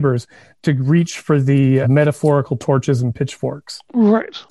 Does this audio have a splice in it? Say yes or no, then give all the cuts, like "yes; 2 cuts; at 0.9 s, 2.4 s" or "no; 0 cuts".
yes; 1 cut; at 1.8 s